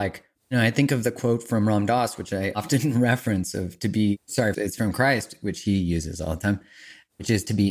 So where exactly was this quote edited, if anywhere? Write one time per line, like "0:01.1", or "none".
0:04.5